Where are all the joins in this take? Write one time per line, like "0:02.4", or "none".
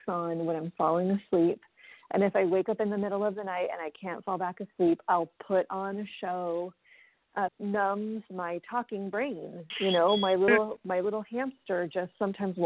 0:07.5